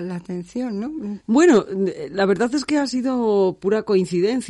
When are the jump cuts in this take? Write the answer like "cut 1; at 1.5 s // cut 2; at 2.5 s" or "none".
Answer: cut 1; at 1.2 s

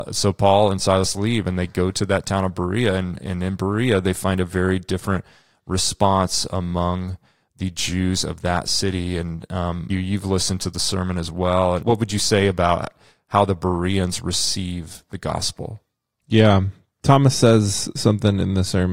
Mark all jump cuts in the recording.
cut 1; at 9.9 s // cut 2; at 11.8 s

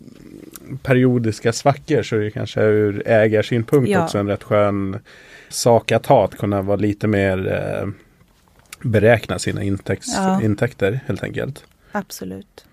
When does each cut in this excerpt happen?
cut 1; at 5.5 s

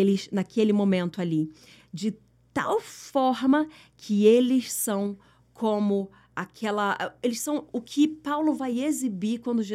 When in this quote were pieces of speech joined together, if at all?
cut 1; at 7.7 s

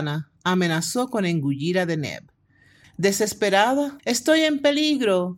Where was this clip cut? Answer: cut 1; at 2.8 s // cut 2; at 4.0 s

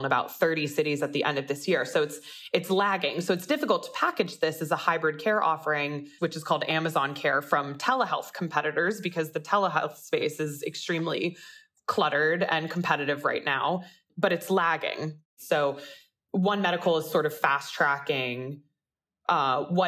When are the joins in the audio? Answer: cut 1; at 6.2 s

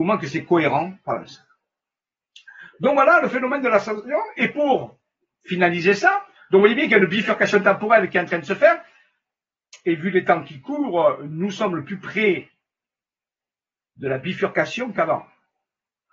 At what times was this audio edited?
none

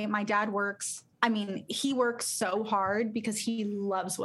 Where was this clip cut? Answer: cut 1; at 1.1 s

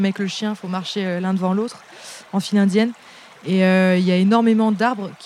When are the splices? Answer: none

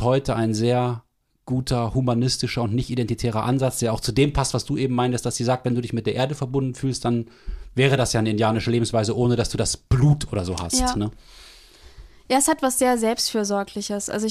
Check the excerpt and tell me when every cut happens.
none

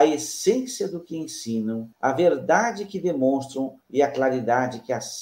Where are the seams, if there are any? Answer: cut 1; at 1.9 s // cut 2; at 3.8 s

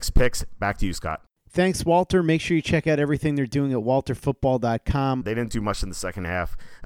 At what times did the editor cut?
cut 1; at 5.2 s

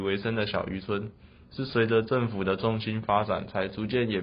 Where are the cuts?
none

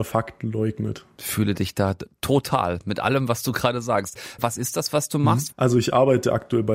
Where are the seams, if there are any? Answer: cut 1; at 5.5 s

